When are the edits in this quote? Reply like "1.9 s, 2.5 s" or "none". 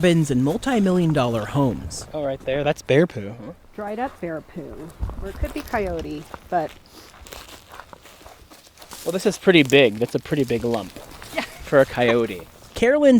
none